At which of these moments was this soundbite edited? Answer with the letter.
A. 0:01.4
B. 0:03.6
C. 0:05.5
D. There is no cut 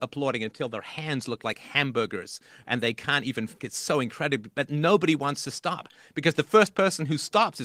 B